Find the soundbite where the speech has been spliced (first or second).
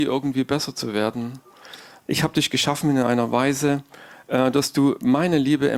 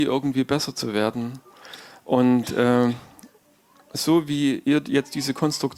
first